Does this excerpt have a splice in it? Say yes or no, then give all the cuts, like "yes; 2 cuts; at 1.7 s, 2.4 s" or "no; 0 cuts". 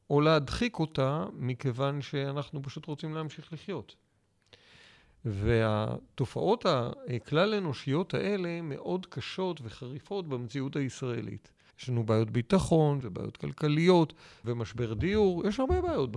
yes; 3 cuts; at 11.7 s, 13.0 s, 14.4 s